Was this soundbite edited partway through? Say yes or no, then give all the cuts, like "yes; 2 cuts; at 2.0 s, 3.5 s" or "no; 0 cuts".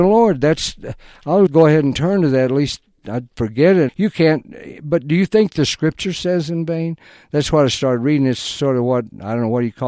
yes; 2 cuts; at 1.5 s, 3.9 s